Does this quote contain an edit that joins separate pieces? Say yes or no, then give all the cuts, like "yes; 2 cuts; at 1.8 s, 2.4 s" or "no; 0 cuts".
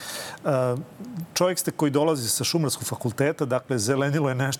no; 0 cuts